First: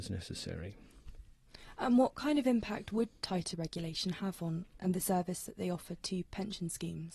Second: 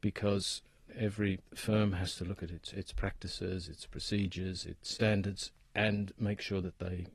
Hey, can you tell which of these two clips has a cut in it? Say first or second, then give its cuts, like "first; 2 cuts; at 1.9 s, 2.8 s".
first; 1 cut; at 4.8 s